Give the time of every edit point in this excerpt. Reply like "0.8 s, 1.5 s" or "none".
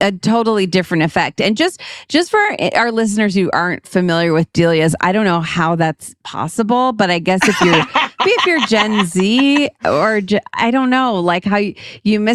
8.2 s

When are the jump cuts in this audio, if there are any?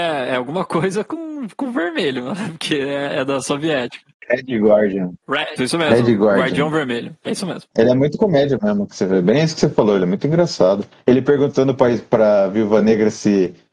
5.6 s

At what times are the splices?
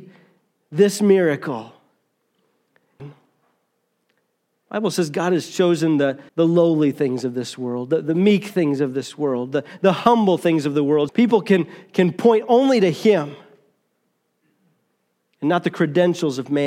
3.0 s, 6.3 s, 11.1 s

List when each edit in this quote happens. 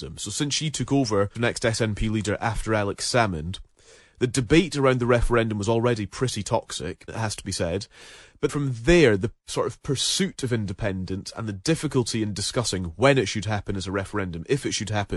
1.3 s, 7.1 s, 8.5 s

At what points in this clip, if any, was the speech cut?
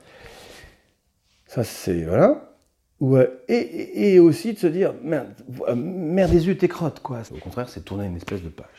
7.3 s

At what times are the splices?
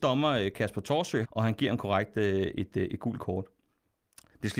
1.2 s

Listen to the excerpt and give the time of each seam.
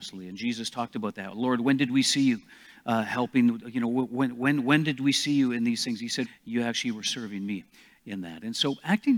6.2 s

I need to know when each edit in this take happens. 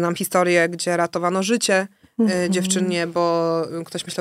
none

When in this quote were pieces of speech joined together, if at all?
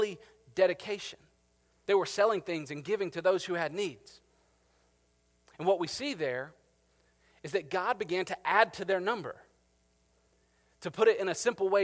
1.9 s

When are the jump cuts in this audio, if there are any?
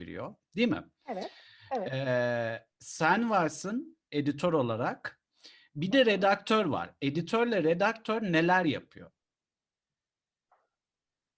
none

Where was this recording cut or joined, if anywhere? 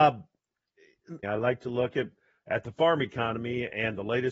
1.2 s

